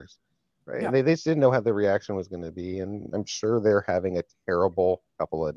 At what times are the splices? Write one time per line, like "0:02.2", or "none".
none